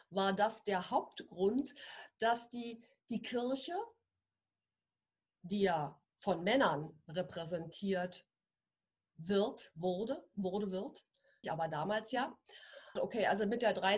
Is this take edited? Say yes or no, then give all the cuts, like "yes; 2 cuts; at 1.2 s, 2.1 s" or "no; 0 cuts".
yes; 2 cuts; at 11.4 s, 13.0 s